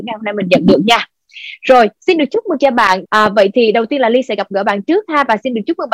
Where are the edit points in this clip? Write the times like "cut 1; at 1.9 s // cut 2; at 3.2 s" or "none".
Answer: cut 1; at 3.0 s